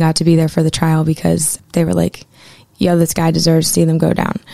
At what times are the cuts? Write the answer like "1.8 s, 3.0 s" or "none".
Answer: 1.6 s